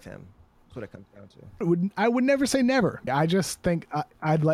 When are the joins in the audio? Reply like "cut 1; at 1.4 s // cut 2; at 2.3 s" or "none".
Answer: cut 1; at 1.6 s // cut 2; at 3.1 s